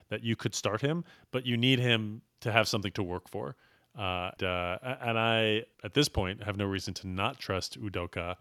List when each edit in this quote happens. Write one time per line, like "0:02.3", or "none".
0:04.4
0:05.7